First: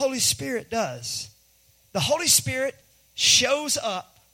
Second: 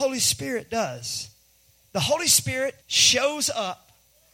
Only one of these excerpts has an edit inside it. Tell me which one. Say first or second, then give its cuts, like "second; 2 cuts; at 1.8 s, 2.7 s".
second; 1 cut; at 2.8 s